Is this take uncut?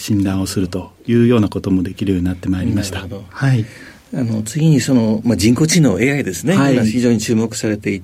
yes; 0 cuts

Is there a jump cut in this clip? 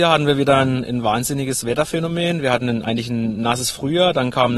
no; 0 cuts

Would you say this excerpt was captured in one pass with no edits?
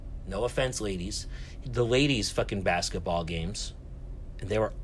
no; 1 cut; at 1.6 s

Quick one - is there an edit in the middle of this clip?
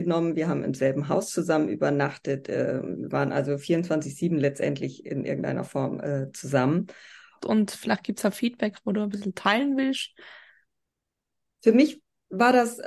yes; 1 cut; at 7.4 s

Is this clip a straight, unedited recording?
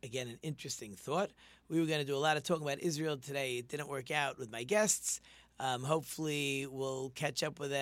yes; 0 cuts

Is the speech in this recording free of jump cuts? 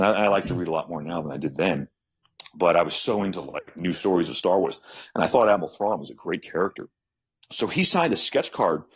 yes; 0 cuts

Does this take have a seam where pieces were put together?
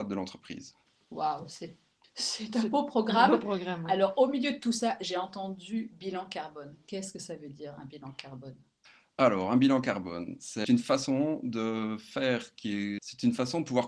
yes; 2 cuts; at 10.6 s, 13.0 s

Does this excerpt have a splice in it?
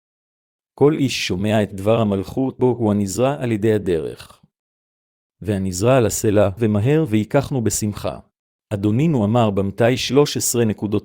yes; 3 cuts; at 2.6 s, 6.6 s, 8.5 s

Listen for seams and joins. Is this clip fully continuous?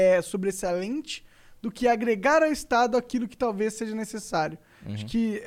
yes; 0 cuts

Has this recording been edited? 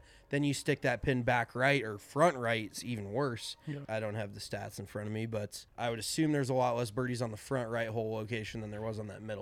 yes; 2 cuts; at 3.8 s, 5.7 s

